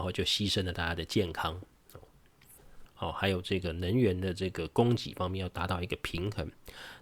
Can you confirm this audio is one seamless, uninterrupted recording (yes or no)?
no